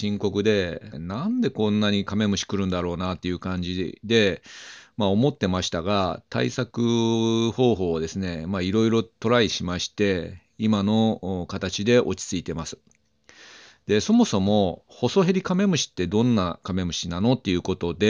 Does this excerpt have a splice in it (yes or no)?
yes